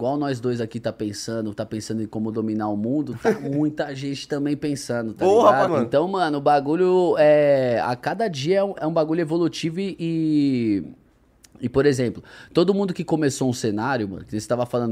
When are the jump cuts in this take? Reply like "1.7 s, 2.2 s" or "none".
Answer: 5.7 s, 8.8 s